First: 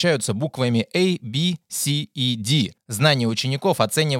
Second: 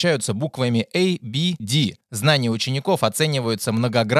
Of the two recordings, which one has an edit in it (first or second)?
second